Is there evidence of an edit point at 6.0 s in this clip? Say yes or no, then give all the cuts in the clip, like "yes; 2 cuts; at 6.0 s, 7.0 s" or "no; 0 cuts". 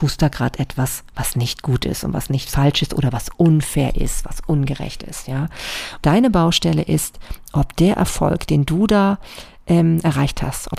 yes; 1 cut; at 6.0 s